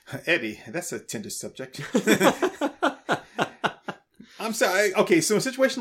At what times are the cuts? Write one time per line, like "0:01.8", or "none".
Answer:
none